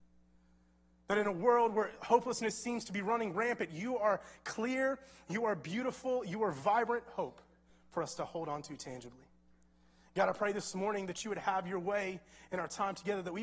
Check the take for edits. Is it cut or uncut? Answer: uncut